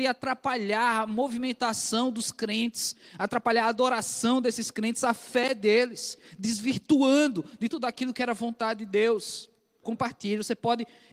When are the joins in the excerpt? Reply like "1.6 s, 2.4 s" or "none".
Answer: 9.8 s